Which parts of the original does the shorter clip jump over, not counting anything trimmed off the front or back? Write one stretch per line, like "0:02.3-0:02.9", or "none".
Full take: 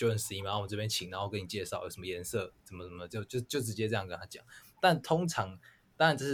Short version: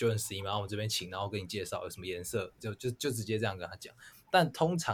0:02.6-0:03.1